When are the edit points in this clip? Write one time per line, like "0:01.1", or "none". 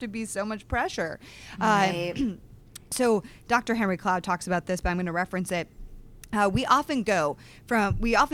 none